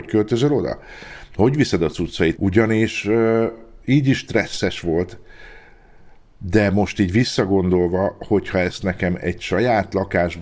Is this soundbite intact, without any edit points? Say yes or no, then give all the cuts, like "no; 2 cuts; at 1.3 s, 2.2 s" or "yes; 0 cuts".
no; 1 cut; at 2.3 s